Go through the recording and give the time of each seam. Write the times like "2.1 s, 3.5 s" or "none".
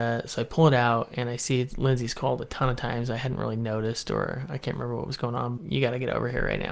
5.6 s